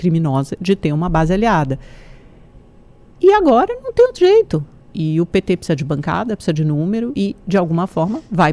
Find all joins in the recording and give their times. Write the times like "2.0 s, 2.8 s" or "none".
4.8 s, 7.1 s